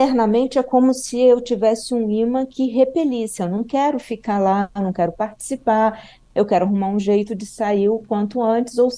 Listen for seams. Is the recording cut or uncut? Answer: uncut